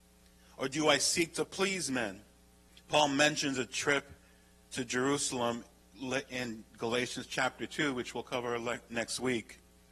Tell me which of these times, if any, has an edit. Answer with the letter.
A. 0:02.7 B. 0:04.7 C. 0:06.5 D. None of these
A